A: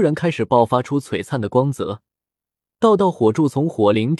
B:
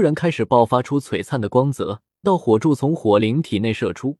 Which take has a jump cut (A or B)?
B